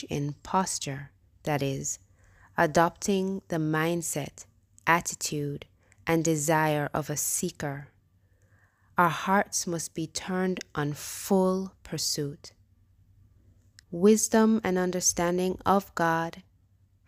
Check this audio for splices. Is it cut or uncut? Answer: cut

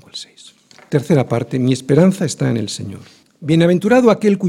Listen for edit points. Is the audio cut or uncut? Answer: uncut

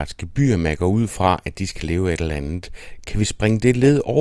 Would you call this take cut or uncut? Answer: uncut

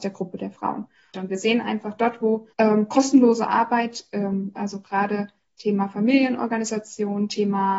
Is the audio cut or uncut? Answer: cut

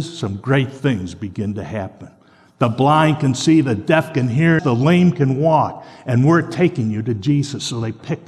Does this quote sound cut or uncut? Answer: cut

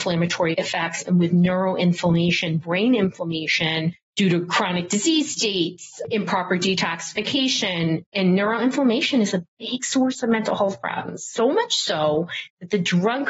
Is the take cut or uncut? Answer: uncut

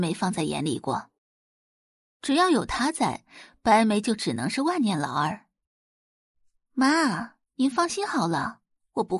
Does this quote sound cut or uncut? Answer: uncut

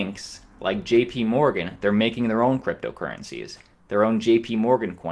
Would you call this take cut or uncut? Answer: uncut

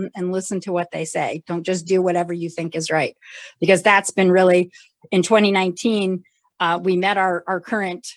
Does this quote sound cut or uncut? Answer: cut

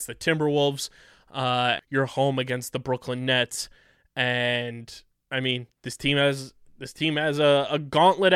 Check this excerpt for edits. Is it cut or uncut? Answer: cut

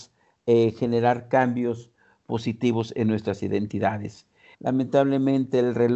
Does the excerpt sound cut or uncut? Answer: cut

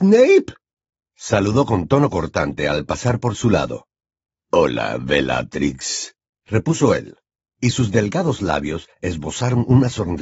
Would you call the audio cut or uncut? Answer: uncut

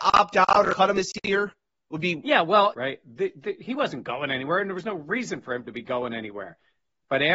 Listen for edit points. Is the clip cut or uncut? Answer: cut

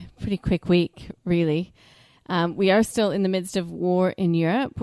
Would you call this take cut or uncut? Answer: uncut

